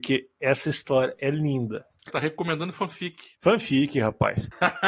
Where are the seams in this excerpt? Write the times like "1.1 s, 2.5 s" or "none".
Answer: 2.1 s